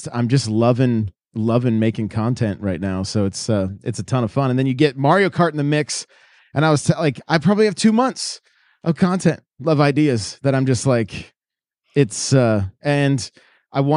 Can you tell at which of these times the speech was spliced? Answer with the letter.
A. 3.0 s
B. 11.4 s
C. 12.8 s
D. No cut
C